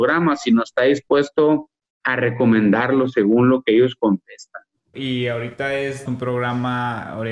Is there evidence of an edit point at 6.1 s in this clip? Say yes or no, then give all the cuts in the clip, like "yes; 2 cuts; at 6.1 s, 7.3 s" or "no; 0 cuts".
yes; 2 cuts; at 4.9 s, 6.1 s